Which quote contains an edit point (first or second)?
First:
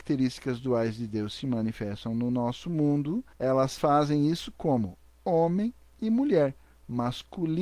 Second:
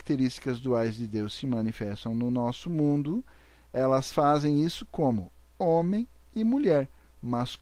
first